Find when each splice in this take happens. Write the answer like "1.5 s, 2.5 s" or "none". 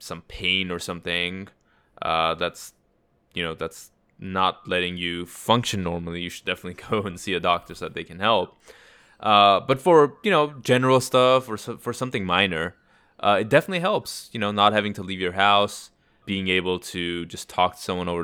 16.2 s